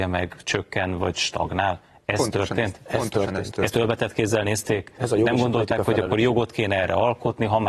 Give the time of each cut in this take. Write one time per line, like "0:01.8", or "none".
none